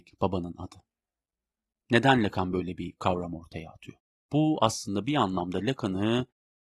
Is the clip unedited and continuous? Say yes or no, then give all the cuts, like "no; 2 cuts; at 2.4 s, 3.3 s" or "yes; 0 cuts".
no; 1 cut; at 4.1 s